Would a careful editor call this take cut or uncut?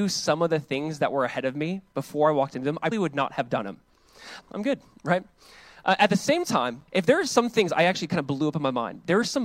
cut